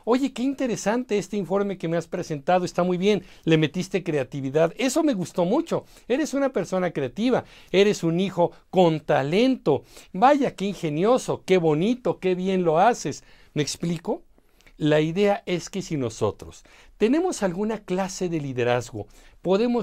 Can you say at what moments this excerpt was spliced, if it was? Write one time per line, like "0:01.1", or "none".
0:10.1
0:11.4